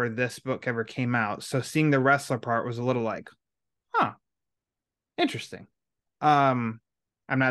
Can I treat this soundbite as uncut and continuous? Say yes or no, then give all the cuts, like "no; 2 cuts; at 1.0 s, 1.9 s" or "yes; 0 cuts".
yes; 0 cuts